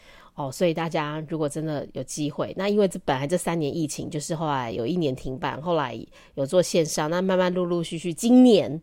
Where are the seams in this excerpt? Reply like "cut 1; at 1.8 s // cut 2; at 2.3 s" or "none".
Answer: none